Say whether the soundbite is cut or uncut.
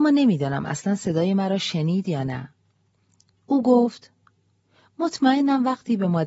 uncut